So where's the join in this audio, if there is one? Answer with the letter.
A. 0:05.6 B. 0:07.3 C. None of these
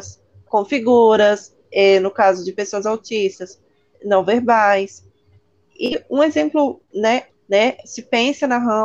B